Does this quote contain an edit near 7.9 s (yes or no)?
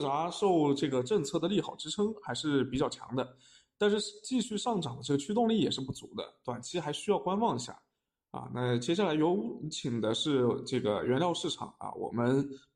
no